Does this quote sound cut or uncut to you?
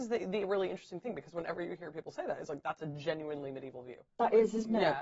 cut